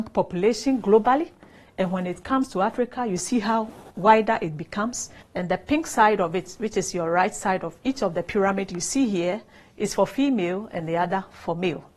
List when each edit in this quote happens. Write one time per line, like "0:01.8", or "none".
0:05.2